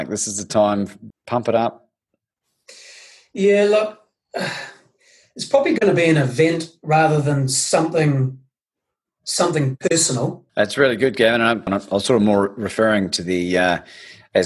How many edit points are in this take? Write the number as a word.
three